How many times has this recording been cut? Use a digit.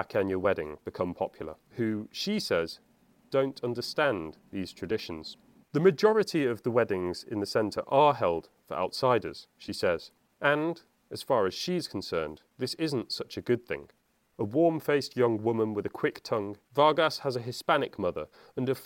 2